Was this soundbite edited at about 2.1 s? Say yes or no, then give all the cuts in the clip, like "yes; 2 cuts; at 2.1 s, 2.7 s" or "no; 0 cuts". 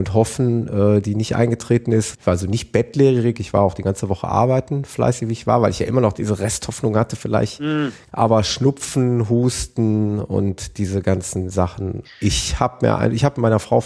yes; 3 cuts; at 2.1 s, 8.1 s, 12.0 s